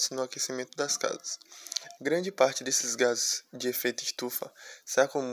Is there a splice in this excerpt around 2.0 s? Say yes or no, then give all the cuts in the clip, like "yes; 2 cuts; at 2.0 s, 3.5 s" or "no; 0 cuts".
yes; 1 cut; at 2.0 s